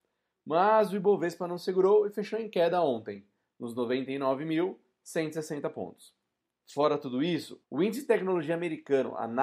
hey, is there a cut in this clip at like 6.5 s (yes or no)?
yes